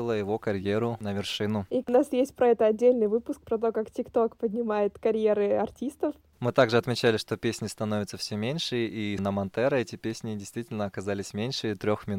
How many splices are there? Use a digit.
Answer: 2